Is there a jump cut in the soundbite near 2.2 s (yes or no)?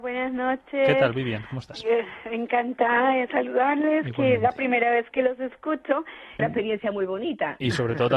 no